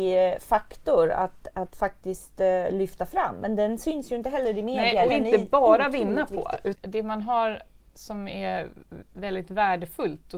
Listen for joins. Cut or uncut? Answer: cut